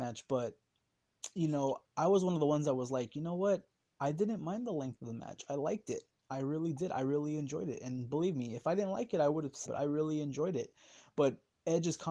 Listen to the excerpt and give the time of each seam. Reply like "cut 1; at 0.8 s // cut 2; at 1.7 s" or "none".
cut 1; at 9.7 s